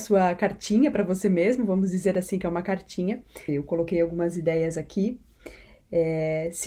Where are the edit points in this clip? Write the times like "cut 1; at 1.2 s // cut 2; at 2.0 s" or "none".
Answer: cut 1; at 3.5 s